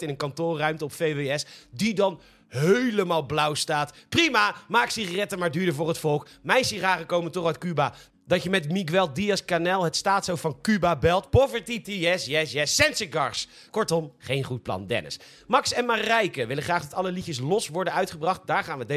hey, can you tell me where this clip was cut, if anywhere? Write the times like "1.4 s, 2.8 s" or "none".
11.8 s